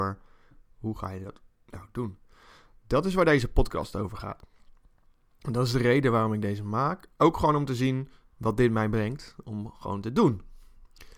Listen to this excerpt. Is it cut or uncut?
uncut